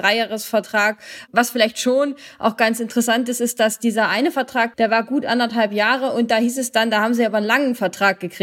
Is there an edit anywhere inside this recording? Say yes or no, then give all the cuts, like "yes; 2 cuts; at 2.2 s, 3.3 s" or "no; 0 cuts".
yes; 1 cut; at 4.7 s